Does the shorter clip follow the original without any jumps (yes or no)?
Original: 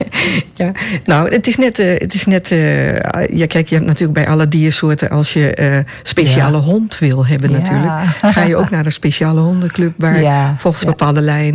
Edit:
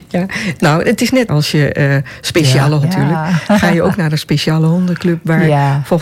no